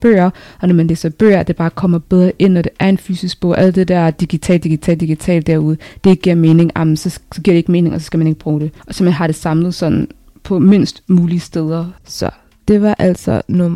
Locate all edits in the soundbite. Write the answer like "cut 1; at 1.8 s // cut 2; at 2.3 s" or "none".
cut 1; at 8.8 s // cut 2; at 12.0 s